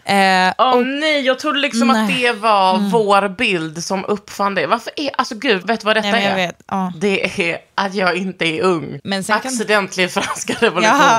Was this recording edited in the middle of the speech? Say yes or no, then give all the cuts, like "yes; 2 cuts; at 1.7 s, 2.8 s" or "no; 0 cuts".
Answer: yes; 2 cuts; at 5.6 s, 9.0 s